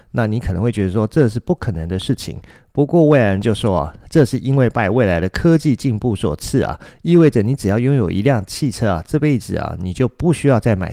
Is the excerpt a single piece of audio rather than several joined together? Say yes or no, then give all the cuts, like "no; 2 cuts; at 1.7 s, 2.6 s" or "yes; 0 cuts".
yes; 0 cuts